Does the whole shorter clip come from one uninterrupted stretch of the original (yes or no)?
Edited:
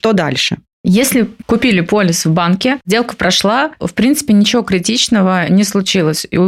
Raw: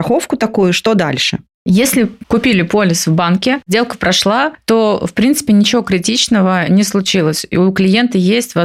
no